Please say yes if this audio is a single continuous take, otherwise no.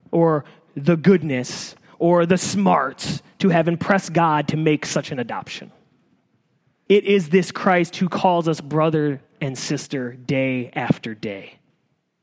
no